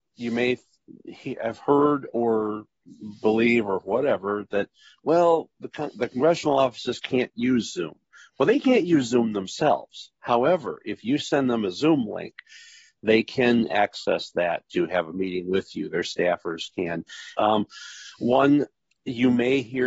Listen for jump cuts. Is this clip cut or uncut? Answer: cut